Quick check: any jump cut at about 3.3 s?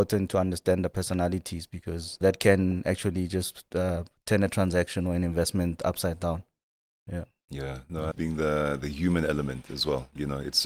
no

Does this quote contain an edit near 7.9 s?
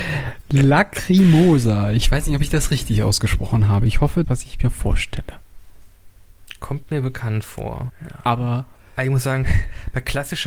yes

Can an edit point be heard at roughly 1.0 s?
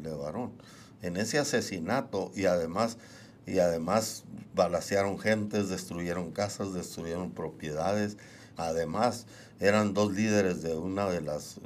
no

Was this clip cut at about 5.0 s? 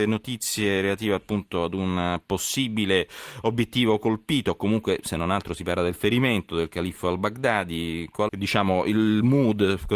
no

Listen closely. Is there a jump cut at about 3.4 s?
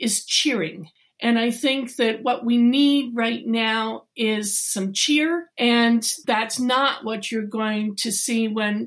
no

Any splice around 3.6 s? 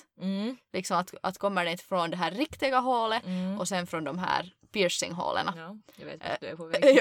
no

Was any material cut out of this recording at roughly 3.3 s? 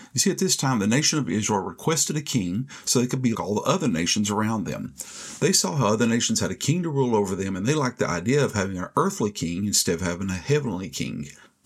yes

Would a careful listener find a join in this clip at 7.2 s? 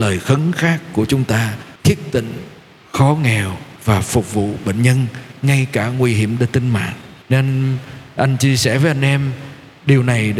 yes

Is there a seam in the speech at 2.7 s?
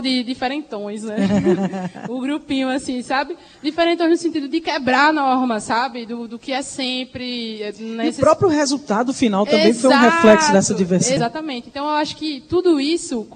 no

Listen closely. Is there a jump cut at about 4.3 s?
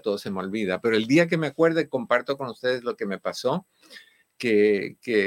no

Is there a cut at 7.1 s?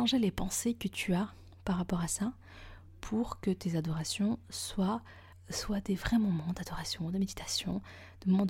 no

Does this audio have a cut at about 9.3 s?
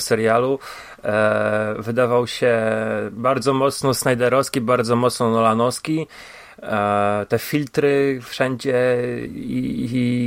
yes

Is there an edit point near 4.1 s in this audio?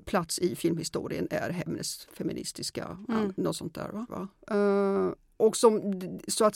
yes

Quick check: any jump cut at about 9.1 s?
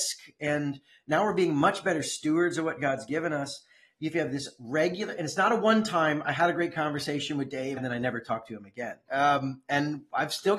yes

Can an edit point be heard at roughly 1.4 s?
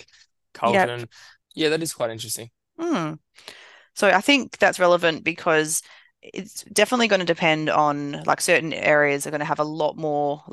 yes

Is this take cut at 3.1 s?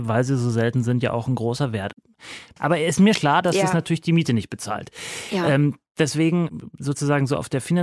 yes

